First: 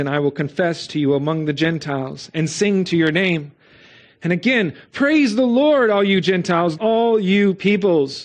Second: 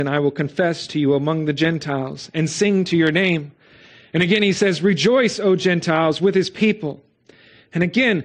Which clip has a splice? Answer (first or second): first